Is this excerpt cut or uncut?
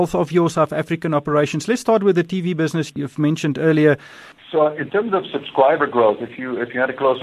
cut